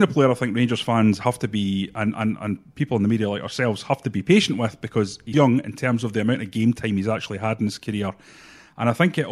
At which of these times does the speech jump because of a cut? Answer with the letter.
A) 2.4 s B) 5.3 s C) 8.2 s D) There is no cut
B